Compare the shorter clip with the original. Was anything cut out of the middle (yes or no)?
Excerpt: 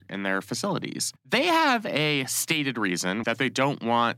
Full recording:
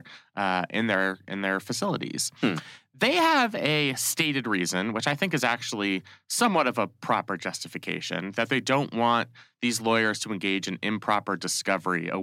yes